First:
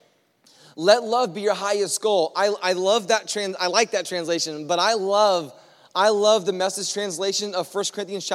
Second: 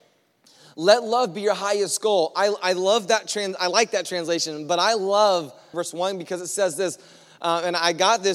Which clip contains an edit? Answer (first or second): second